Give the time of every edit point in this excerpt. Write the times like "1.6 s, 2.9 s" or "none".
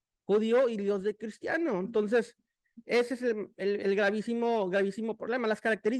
none